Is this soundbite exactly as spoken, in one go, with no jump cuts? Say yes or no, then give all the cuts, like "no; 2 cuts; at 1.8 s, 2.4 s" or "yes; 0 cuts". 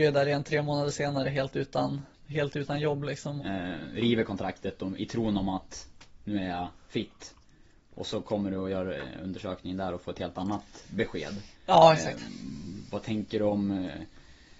no; 2 cuts; at 3.4 s, 5.0 s